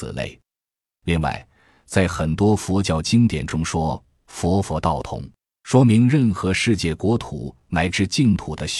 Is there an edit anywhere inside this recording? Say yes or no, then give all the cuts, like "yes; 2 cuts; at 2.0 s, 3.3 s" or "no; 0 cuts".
no; 0 cuts